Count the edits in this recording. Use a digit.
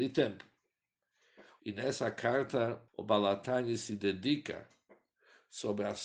2